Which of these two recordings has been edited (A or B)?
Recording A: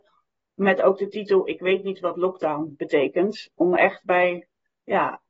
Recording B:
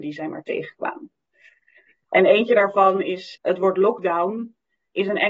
B